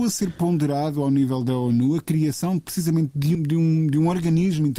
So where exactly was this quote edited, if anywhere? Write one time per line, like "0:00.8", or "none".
0:03.3